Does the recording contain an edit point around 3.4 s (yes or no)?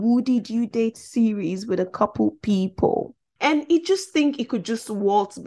yes